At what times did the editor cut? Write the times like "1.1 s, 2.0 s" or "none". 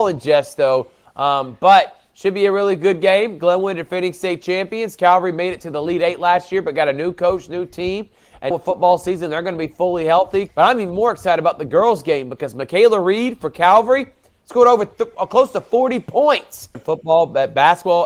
8.5 s, 10.5 s, 16.7 s